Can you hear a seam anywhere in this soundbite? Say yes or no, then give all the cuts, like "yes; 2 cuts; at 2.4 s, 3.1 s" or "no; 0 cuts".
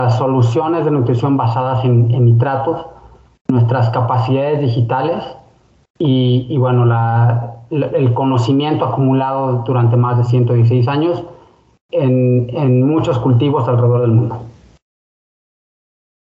no; 0 cuts